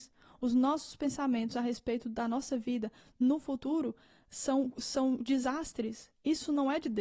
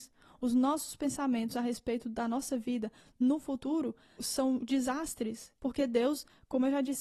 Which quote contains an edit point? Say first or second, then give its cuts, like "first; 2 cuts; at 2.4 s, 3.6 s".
second; 2 cuts; at 4.2 s, 5.6 s